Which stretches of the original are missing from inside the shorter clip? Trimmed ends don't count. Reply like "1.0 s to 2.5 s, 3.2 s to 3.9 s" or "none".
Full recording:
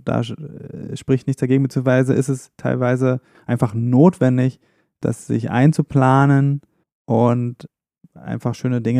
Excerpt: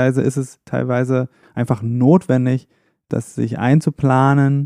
none